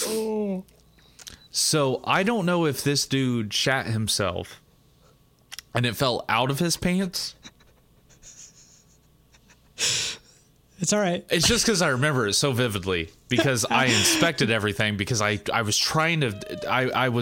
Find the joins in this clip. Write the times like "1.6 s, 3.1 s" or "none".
11.3 s

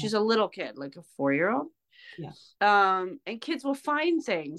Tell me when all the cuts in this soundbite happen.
2.6 s

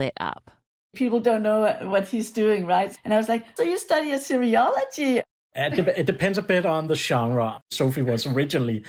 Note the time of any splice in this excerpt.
3.6 s, 5.4 s, 7.6 s

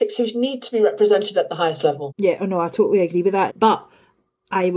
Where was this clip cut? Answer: 2.1 s, 3.5 s

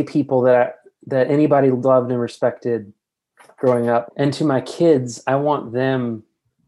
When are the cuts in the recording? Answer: 4.1 s

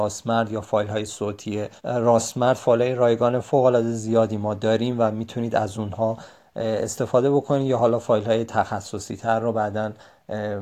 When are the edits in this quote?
1.8 s

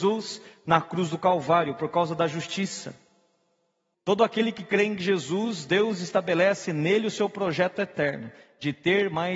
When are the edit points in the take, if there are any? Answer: 3.9 s

